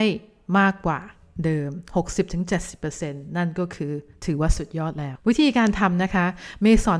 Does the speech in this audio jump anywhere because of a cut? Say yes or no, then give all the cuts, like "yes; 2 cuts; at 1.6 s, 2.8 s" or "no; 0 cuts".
yes; 1 cut; at 5.2 s